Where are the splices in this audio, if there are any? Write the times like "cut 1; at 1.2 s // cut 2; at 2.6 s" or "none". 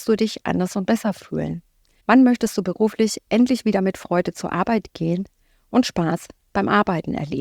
none